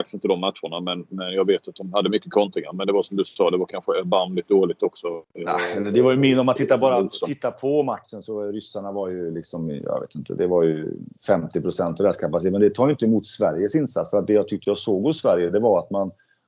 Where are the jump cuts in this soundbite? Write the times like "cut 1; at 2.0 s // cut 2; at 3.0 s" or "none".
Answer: none